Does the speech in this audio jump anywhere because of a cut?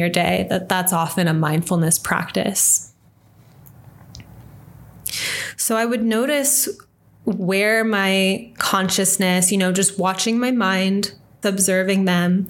yes; 1 cut; at 11.4 s

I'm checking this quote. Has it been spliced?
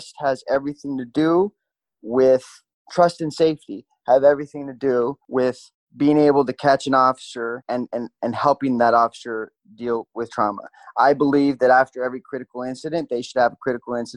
no; 0 cuts

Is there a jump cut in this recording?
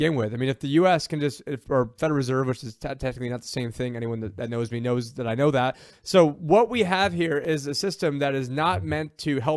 no; 0 cuts

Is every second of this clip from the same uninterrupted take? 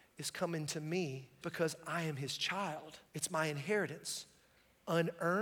no; 2 cuts; at 1.4 s, 3.1 s

